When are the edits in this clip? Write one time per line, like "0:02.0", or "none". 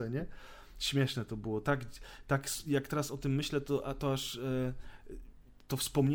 none